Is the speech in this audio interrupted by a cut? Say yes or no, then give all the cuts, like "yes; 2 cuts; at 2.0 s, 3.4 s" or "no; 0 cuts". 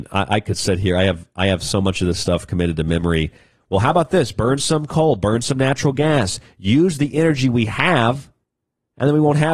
yes; 1 cut; at 3.5 s